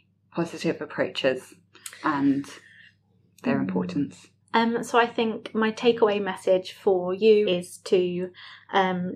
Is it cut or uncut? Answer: cut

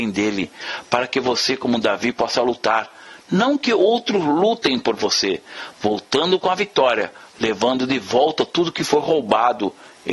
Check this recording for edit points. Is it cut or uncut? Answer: cut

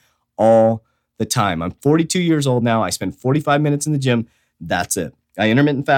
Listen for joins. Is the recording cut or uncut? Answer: uncut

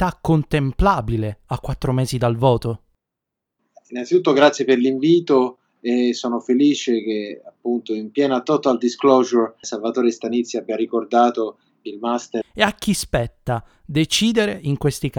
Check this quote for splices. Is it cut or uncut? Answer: cut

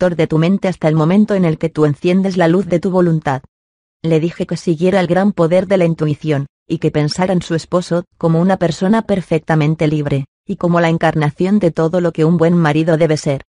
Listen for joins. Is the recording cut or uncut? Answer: cut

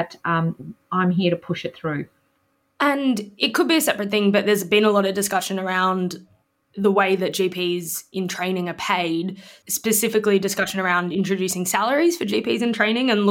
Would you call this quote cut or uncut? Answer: uncut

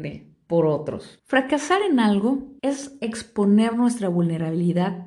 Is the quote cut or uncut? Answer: cut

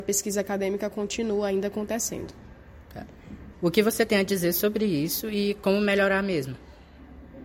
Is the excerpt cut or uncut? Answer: cut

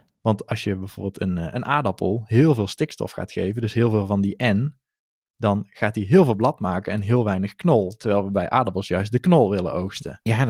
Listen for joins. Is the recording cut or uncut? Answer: uncut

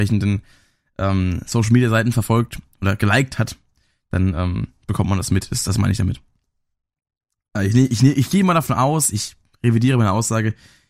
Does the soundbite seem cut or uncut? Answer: uncut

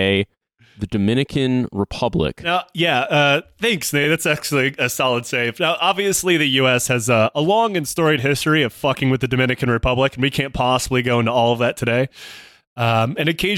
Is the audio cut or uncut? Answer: uncut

